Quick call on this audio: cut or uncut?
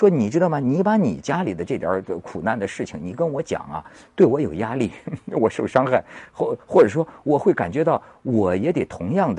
uncut